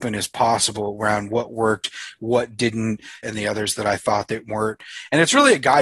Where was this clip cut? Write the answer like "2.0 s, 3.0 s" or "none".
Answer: 3.2 s

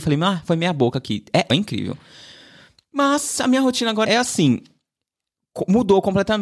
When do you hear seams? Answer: 1.5 s, 4.1 s

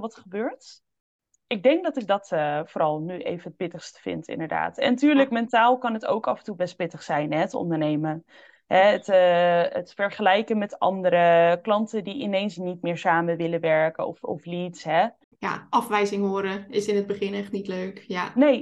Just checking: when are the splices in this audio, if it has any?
none

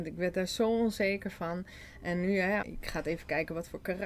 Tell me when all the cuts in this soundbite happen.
2.6 s

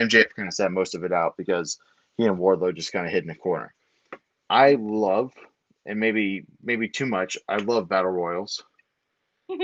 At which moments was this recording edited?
none

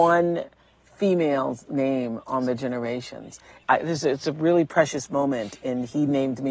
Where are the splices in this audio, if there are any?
3.6 s

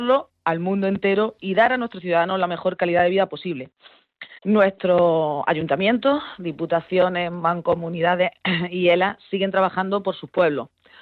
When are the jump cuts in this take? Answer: 4.4 s

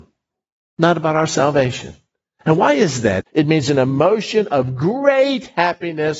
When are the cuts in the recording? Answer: 3.2 s

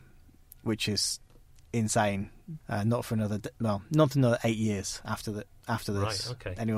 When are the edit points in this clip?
2.6 s

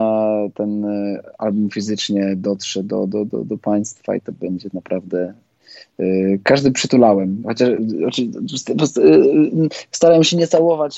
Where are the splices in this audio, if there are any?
none

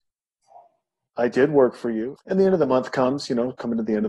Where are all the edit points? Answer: 2.2 s

